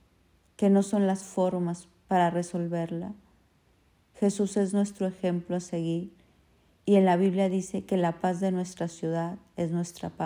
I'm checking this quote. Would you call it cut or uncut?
uncut